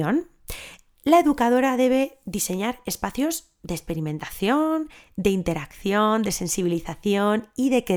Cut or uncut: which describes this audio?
uncut